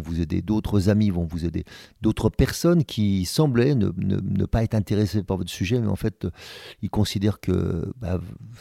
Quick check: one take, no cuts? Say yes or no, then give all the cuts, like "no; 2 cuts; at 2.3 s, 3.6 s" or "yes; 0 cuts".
yes; 0 cuts